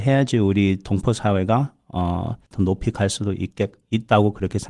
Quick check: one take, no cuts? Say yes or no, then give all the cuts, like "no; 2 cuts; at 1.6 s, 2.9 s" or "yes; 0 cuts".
no; 1 cut; at 2.5 s